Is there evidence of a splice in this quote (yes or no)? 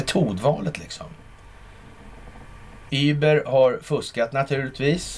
yes